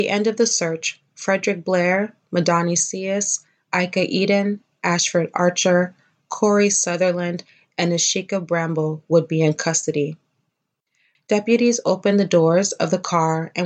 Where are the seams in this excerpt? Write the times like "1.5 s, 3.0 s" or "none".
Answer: 11.2 s

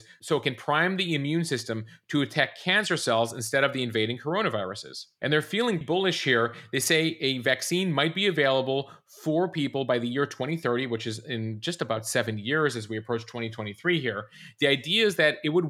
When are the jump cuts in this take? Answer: 5.8 s

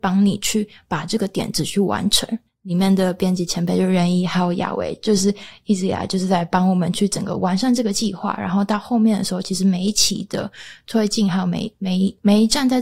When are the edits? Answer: 2.5 s

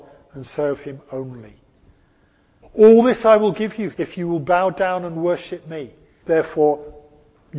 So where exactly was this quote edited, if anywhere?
2.6 s, 3.9 s, 6.2 s

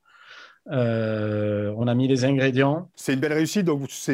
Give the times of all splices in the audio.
1.8 s, 2.9 s

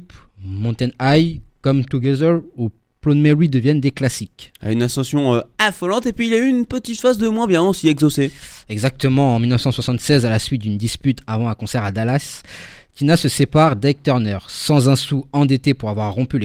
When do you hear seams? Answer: none

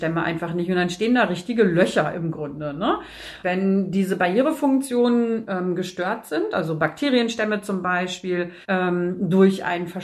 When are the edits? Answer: 3.4 s, 8.6 s

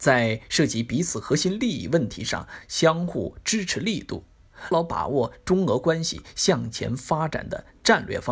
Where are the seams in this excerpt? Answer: 4.7 s

